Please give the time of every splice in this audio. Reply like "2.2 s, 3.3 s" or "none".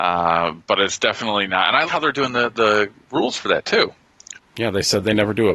1.9 s, 4.4 s

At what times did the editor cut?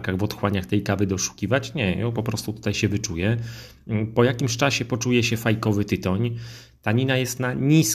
none

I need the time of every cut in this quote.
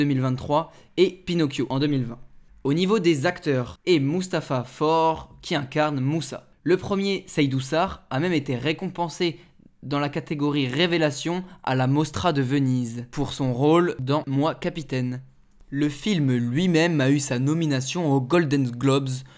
3.7 s

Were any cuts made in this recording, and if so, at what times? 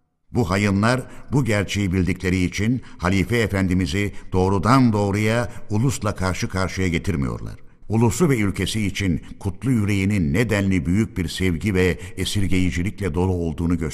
7.8 s

